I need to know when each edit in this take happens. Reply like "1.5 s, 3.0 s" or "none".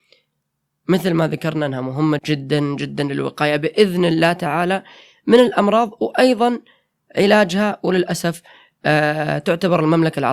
2.2 s